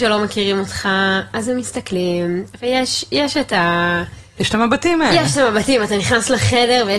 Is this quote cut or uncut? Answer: cut